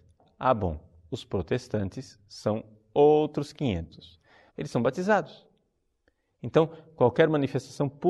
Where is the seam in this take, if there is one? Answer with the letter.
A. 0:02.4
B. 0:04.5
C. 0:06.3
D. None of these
B